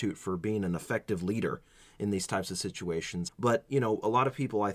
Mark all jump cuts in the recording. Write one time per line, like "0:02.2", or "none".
0:03.3